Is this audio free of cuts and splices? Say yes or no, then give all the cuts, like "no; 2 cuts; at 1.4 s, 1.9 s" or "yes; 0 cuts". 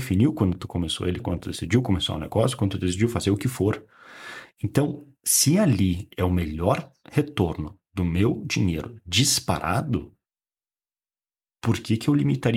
no; 1 cut; at 1.2 s